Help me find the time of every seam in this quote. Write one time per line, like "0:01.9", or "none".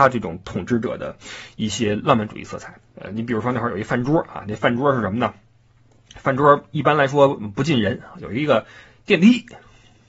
0:02.9